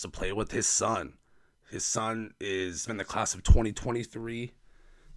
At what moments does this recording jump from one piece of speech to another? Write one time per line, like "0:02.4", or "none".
0:02.9

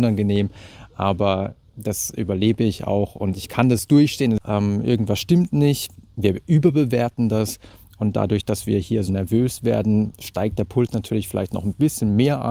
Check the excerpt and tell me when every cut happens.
0:04.4
0:09.1

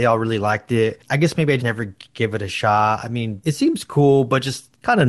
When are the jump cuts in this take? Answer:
0:01.6

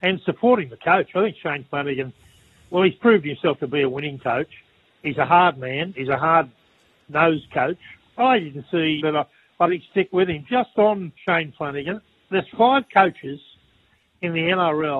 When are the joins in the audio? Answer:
0:09.0
0:11.2

